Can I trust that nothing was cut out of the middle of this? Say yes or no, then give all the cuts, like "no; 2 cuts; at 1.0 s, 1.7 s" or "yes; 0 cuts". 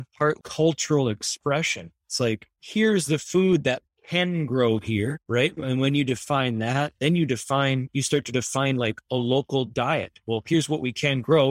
yes; 0 cuts